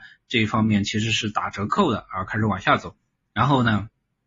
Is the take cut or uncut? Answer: uncut